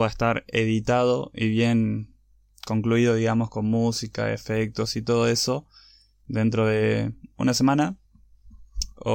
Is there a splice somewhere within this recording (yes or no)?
no